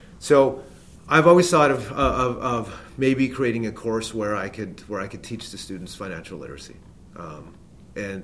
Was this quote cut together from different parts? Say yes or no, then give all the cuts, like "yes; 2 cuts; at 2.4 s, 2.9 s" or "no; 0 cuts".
no; 0 cuts